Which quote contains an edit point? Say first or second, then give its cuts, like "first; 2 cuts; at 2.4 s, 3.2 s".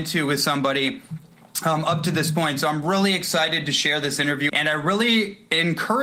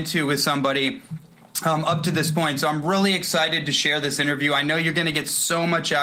first; 1 cut; at 4.5 s